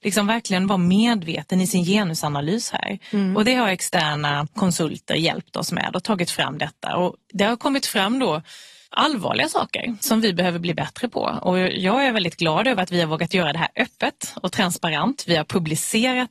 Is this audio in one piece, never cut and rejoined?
yes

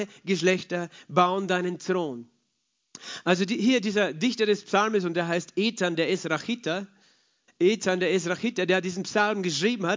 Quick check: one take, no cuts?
yes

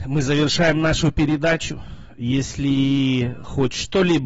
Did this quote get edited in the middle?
no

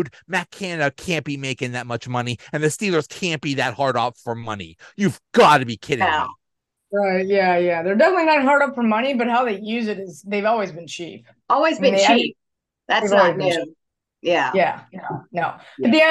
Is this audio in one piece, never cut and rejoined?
yes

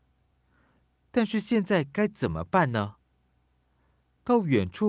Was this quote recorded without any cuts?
yes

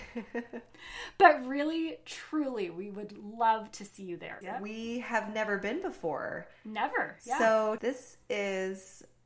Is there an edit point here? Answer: yes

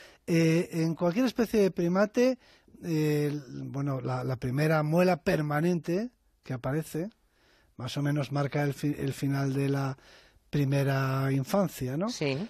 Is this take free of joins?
yes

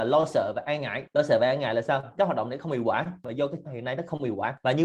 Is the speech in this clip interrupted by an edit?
yes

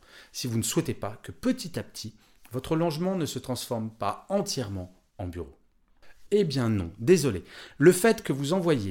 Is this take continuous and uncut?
no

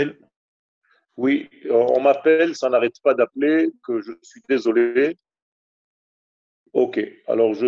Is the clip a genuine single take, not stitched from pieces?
no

